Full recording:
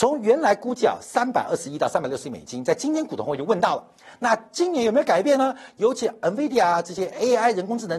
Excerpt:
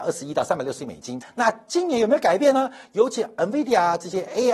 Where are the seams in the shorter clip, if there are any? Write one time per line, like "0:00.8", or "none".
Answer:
0:01.2